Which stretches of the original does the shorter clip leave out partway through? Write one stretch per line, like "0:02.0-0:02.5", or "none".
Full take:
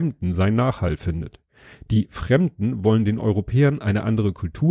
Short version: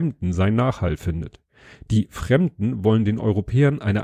none